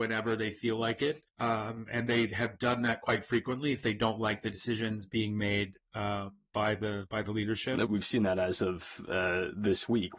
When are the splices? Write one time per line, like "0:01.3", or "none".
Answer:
0:01.3
0:07.9